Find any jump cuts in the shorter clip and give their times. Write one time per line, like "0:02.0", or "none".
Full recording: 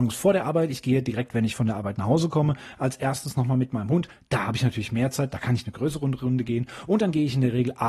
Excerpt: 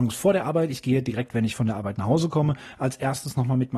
none

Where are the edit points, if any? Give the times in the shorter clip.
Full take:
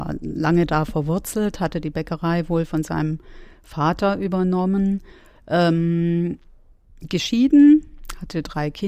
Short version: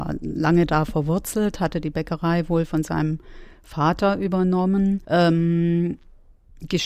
0:05.0

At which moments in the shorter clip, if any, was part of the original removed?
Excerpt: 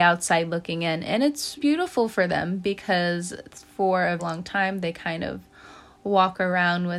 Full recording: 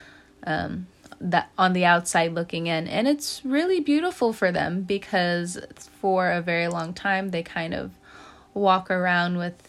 0:01.6
0:04.2

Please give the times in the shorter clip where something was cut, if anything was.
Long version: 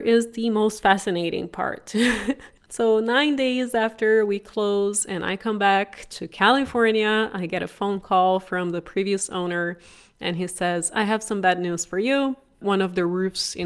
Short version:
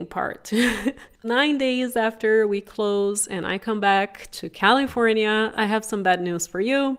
0:01.2
0:05.5

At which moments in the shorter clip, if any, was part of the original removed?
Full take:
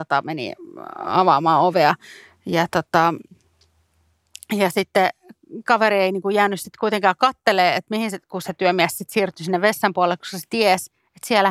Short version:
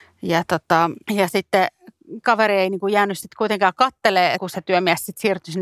0:01.0
0:04.4

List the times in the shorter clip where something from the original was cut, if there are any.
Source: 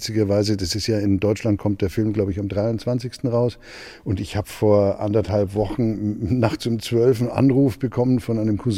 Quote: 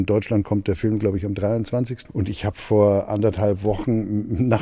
0:02.1

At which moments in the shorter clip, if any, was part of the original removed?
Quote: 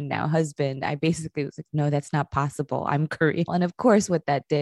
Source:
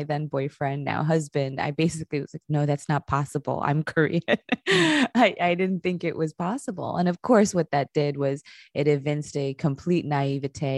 0:03.5

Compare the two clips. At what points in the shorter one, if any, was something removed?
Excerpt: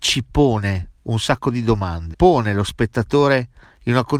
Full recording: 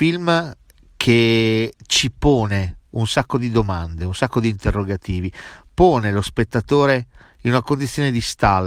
0:02.1

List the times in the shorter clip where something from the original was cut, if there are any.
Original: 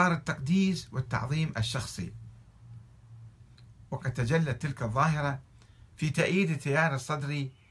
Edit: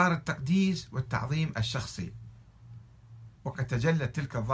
0:03.4

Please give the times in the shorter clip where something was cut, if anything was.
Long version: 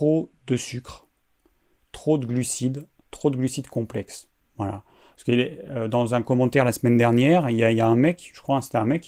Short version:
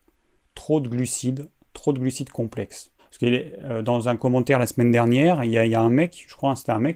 0:03.0

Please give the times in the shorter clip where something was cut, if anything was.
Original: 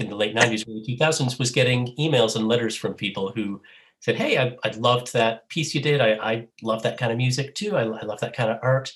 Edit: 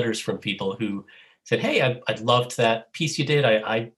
none

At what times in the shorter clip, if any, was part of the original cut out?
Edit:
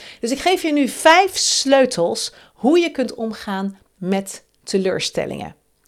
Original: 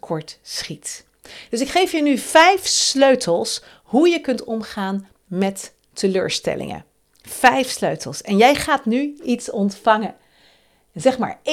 none

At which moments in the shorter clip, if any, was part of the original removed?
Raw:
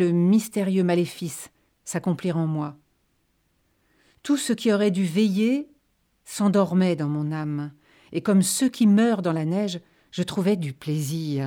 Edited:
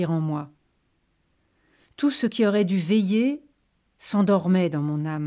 none

